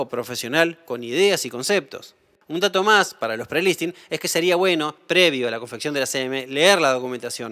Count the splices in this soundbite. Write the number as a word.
zero